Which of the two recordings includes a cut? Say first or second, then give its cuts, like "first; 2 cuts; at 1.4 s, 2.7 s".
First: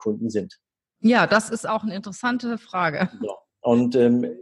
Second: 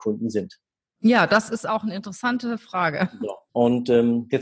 second; 1 cut; at 3.5 s